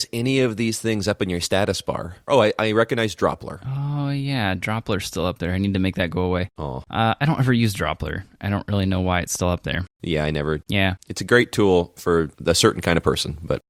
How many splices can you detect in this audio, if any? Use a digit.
2